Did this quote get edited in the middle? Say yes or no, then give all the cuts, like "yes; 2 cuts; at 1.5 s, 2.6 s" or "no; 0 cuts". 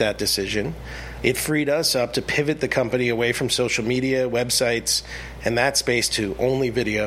no; 0 cuts